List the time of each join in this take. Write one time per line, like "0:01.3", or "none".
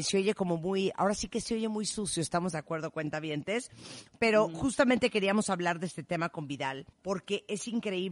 0:06.9